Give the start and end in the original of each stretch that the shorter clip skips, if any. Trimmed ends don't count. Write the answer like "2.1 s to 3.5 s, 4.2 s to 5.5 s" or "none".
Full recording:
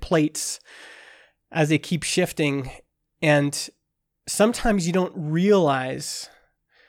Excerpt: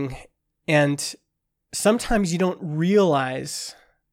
none